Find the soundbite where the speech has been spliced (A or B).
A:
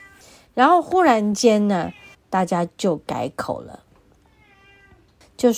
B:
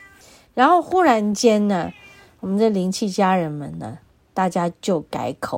A